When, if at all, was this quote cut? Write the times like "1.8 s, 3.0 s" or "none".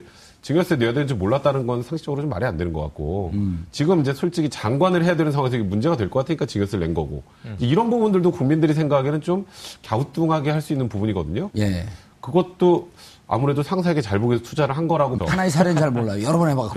11.5 s, 15.2 s